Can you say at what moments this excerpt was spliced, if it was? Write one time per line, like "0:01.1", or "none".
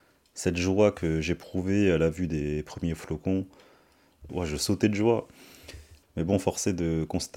0:04.3
0:06.0